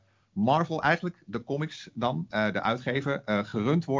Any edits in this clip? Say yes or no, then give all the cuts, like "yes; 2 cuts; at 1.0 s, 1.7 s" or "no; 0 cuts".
no; 0 cuts